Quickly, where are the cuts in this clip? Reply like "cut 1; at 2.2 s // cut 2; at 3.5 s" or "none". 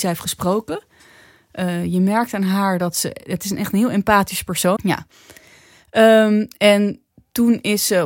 cut 1; at 4.8 s